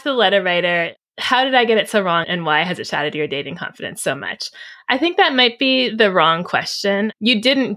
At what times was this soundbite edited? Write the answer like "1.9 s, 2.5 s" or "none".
2.2 s